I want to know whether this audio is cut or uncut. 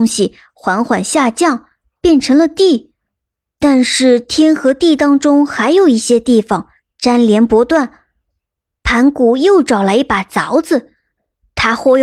uncut